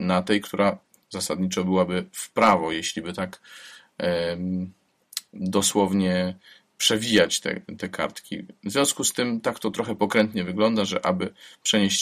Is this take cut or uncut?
uncut